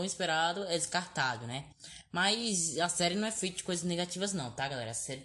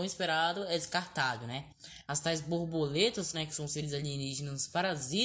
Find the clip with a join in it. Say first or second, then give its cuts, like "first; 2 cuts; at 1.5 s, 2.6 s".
second; 2 cuts; at 2.0 s, 3.3 s